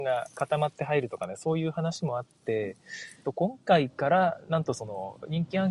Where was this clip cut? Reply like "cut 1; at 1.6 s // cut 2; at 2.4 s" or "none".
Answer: cut 1; at 3.2 s